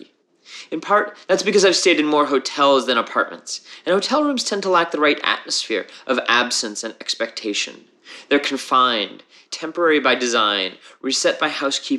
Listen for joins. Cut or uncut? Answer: uncut